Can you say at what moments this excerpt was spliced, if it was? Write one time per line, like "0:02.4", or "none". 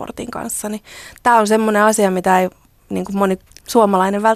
none